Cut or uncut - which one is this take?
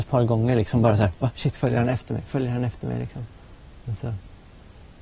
uncut